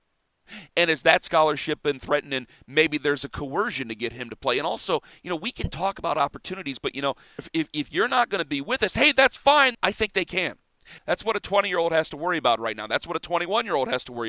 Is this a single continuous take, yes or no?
no